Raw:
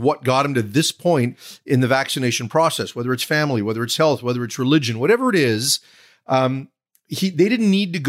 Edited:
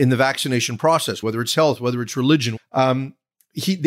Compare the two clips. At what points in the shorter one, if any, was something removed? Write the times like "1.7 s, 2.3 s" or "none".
1.2 s, 2.6 s